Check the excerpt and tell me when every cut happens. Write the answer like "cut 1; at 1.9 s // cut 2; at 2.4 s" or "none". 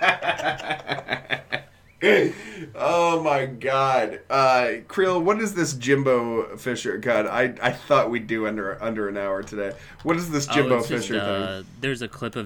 none